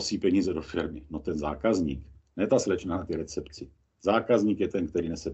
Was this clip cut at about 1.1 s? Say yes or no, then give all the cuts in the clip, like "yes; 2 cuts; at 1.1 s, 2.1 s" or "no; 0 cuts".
no; 0 cuts